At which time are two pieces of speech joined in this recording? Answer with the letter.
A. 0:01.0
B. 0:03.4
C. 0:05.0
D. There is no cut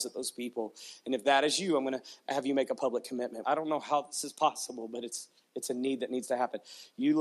B